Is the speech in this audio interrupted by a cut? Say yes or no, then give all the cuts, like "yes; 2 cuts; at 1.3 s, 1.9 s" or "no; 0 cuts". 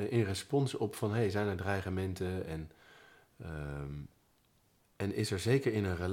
no; 0 cuts